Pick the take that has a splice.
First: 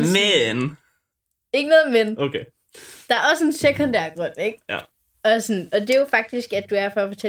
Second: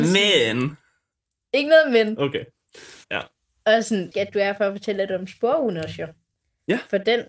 second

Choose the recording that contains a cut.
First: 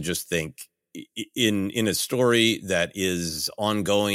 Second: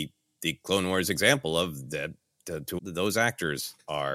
second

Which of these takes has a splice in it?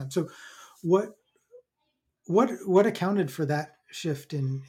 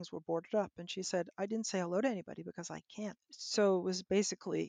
second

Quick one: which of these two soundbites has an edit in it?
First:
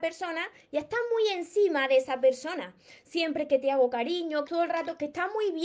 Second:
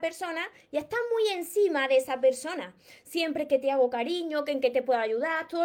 first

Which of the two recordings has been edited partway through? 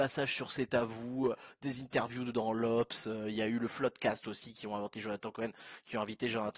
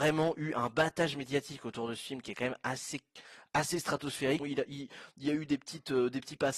second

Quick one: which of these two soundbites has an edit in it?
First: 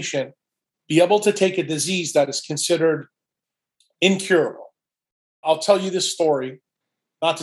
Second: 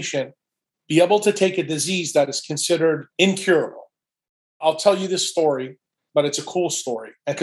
second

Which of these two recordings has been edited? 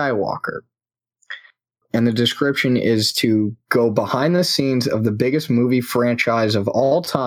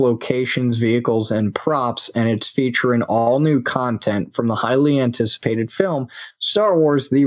first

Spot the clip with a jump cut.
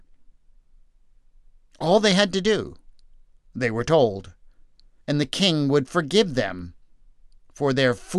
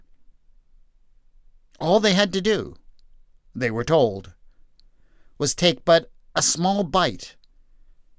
first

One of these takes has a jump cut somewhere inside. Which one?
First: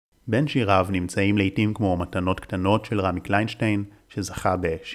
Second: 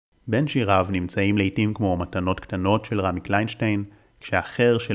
first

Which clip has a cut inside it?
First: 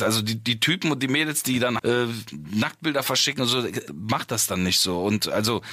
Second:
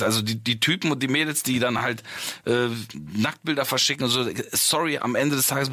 first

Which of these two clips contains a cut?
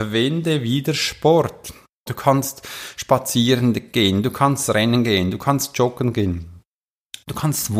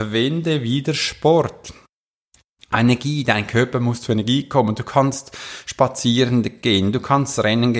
first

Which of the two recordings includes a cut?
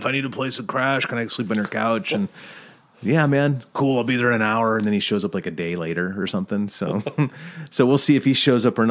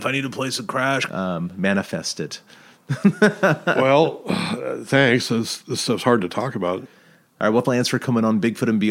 second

